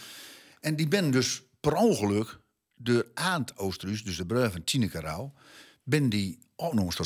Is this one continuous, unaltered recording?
yes; 0 cuts

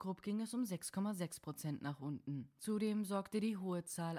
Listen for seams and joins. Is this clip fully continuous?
no; 1 cut; at 2.6 s

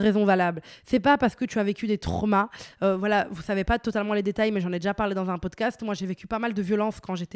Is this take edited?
no; 0 cuts

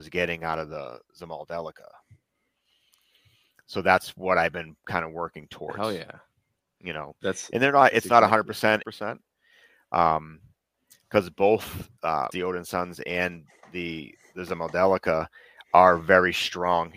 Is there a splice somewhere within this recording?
yes; 2 cuts; at 8.8 s, 12.3 s

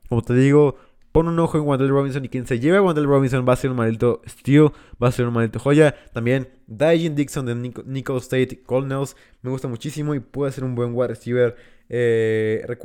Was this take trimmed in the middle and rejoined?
no; 0 cuts

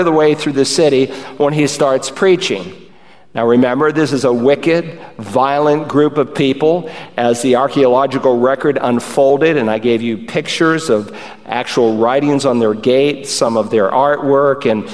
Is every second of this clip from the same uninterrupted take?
yes; 0 cuts

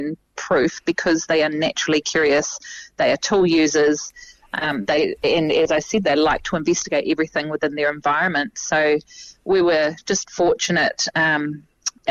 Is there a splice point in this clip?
no; 0 cuts

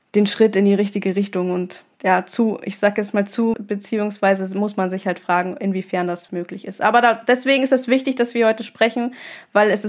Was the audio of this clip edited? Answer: yes; 3 cuts; at 1.9 s, 3.5 s, 6.3 s

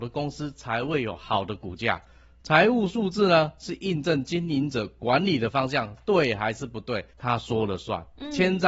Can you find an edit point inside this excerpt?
yes; 1 cut; at 7.1 s

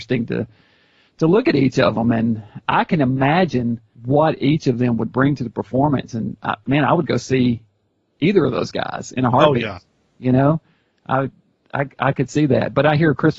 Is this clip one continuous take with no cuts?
yes; 0 cuts

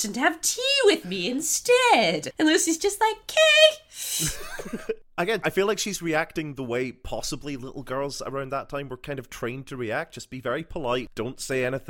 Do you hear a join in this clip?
yes; 1 cut; at 5.4 s

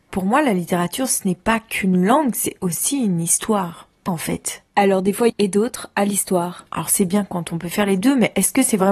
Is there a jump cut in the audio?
yes; 2 cuts; at 4.1 s, 5.3 s

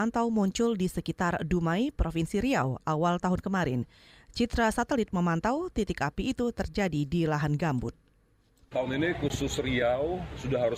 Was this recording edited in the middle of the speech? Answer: no; 0 cuts

